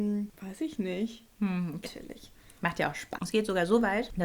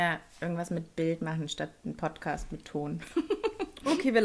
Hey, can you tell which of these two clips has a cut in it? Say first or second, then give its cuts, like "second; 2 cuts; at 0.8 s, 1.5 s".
first; 2 cuts; at 1.8 s, 3.2 s